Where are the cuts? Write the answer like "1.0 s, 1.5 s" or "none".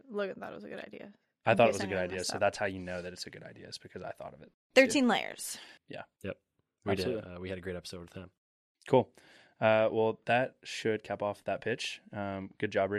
5.8 s